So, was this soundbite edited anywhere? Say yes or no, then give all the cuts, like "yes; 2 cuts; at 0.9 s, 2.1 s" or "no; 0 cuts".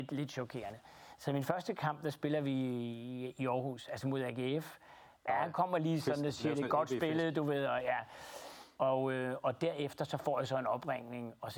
yes; 1 cut; at 5.3 s